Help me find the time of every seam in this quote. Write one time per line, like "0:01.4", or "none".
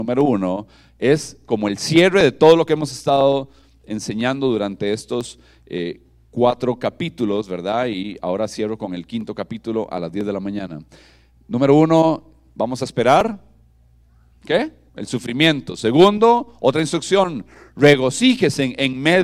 0:14.9